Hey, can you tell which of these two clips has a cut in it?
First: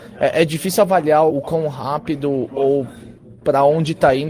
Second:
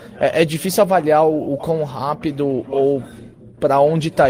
first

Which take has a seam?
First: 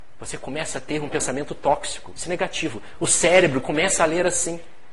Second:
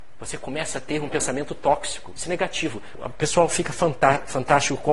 second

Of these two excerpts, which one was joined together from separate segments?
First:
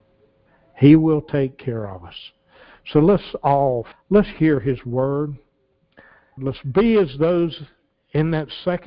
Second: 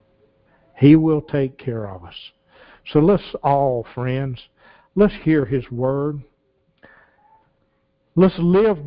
first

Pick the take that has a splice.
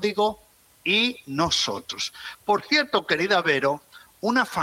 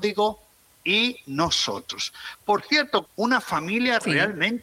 second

